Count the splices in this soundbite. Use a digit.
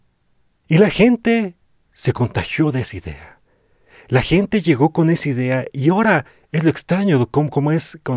0